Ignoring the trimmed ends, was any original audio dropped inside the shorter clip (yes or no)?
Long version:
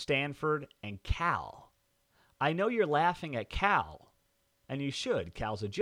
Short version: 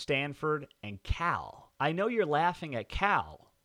yes